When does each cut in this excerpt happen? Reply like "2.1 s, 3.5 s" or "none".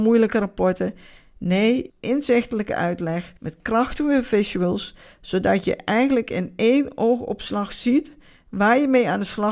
1.9 s, 3.4 s